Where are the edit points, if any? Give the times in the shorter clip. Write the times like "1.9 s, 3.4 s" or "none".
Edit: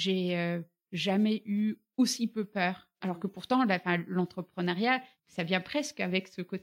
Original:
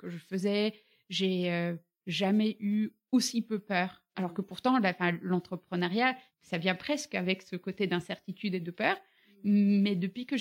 none